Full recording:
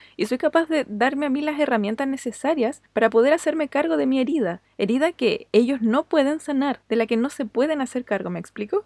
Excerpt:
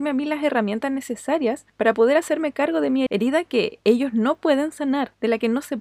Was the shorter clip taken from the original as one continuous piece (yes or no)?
no